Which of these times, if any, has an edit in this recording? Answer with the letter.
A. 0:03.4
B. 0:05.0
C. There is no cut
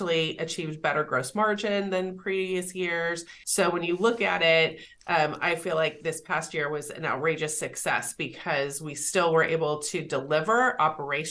A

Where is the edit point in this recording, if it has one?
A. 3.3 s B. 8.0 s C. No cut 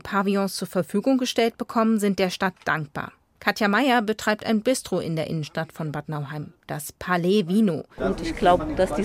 B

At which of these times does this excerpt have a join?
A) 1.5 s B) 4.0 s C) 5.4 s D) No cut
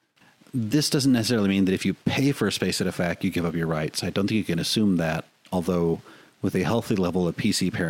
D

